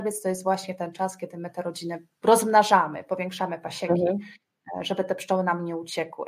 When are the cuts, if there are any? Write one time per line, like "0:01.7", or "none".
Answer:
0:02.1